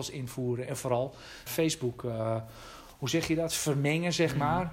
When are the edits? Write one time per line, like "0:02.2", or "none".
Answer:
0:01.5